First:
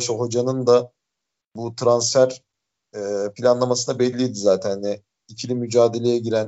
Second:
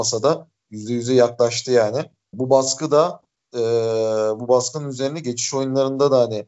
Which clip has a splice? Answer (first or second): second